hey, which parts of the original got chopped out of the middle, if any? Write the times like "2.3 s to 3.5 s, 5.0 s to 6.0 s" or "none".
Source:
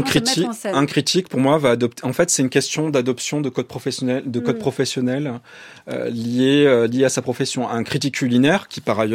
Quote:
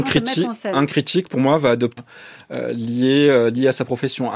2.0 s to 5.3 s